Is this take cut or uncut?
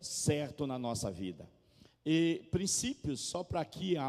cut